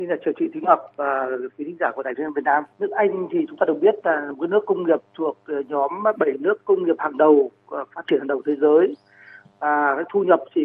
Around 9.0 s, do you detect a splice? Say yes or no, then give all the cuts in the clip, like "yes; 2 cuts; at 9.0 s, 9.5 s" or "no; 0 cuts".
no; 1 cut; at 2.7 s